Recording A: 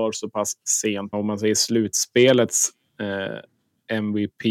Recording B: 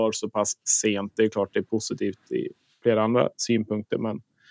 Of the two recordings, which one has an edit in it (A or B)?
A